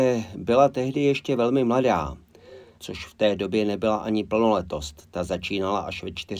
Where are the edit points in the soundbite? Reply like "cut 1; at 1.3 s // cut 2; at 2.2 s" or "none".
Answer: cut 1; at 2.8 s